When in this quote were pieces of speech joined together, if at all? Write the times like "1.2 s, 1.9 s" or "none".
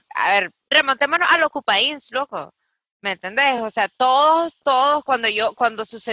none